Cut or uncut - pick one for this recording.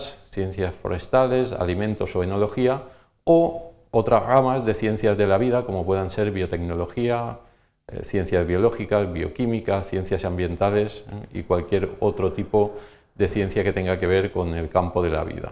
uncut